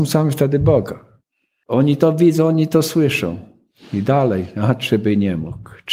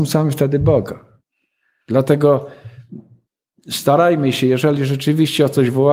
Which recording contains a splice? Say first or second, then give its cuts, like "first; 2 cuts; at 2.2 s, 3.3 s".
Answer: first; 1 cut; at 1.6 s